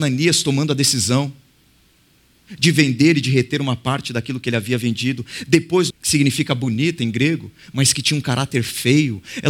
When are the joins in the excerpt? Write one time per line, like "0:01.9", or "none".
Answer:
0:05.9